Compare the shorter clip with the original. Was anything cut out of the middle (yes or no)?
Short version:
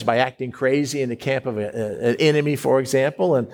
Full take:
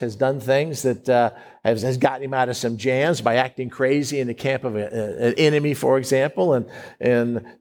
no